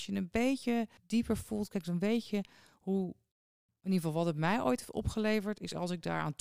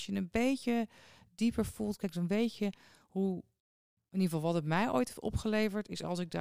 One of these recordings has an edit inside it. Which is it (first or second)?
first